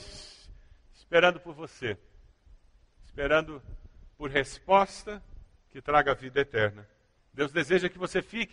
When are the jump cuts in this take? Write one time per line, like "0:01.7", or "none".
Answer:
0:07.2